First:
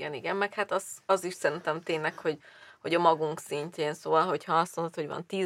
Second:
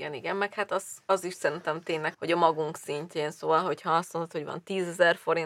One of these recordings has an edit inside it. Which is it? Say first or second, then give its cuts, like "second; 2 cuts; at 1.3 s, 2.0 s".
second; 1 cut; at 2.1 s